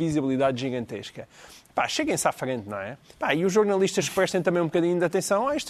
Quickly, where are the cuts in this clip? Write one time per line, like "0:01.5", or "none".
0:03.1